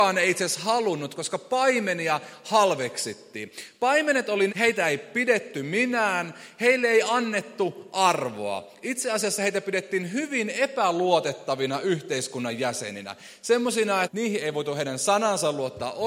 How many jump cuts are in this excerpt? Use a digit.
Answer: 2